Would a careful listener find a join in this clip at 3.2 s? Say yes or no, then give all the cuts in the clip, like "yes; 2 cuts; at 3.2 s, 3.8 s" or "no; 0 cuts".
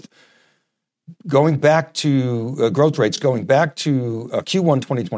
no; 0 cuts